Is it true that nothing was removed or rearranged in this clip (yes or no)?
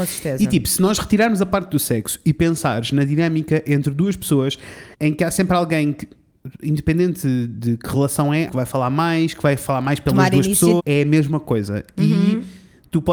no